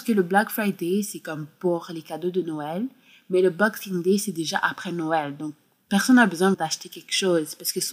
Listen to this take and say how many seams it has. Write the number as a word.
one